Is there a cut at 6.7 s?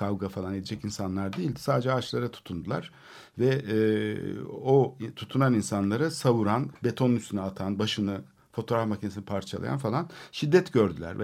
yes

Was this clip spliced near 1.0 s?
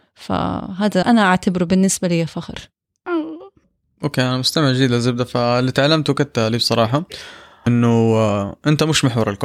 yes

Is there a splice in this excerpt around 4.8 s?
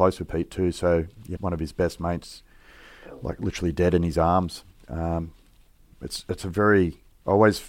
no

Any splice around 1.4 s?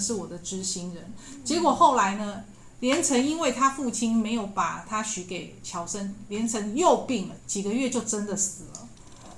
no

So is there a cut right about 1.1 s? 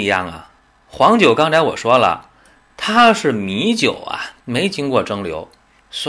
no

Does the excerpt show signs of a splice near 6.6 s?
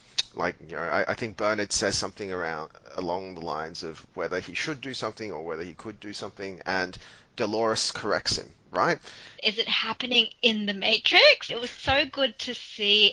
no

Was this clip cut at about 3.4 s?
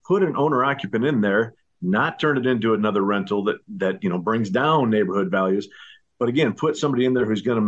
no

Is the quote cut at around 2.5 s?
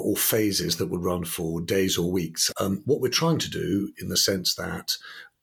yes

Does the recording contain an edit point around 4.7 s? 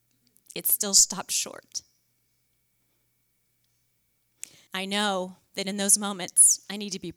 yes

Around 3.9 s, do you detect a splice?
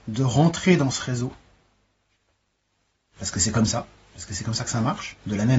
no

